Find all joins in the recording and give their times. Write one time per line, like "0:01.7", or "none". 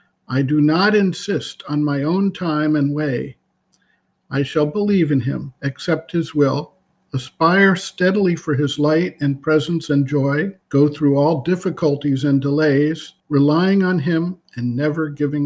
0:04.2
0:10.6
0:13.2